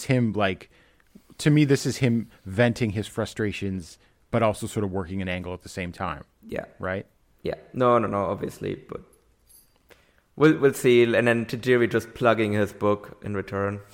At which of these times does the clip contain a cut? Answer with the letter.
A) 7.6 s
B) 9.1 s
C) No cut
C